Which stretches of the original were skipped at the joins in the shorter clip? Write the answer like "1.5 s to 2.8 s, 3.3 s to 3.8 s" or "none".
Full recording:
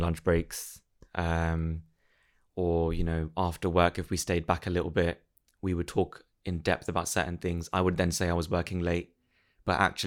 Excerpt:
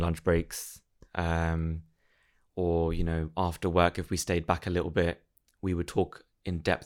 none